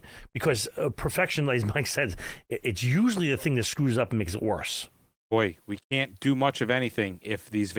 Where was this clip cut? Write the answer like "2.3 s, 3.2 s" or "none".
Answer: 2.6 s, 5.1 s